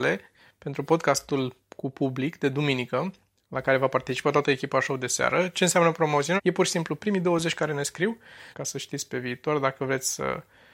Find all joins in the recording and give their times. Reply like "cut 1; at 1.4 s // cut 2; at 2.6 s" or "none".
cut 1; at 6.4 s // cut 2; at 8.5 s